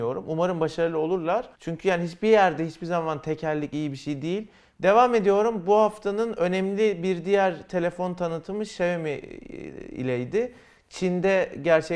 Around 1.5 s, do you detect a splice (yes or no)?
yes